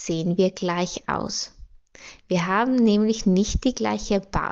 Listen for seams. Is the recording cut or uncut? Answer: uncut